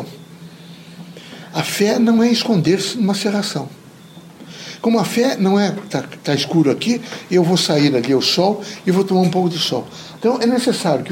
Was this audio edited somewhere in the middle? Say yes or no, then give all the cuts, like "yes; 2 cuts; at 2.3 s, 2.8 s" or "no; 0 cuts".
yes; 1 cut; at 10.2 s